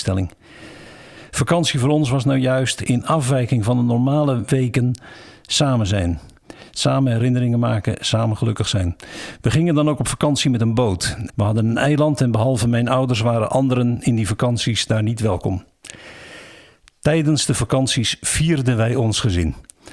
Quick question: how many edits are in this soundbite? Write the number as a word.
one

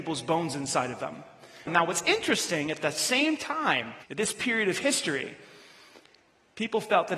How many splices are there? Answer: two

